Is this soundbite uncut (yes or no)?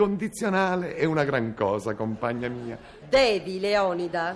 no